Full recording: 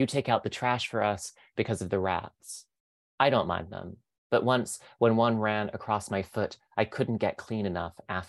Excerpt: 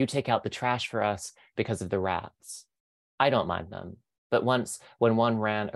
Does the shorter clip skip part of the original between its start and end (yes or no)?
no